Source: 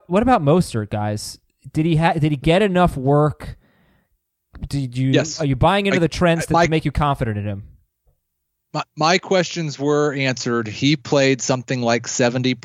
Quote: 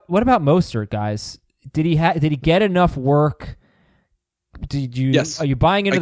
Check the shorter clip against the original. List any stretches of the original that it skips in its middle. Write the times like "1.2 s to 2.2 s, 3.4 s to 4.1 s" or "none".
none